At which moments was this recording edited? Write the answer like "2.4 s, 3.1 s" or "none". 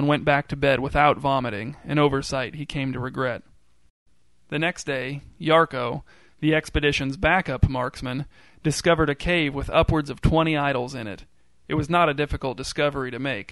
none